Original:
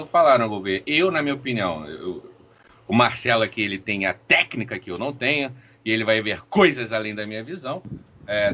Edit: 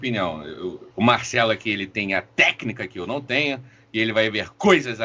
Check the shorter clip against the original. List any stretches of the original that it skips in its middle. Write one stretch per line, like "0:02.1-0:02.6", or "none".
0:02.3-0:02.8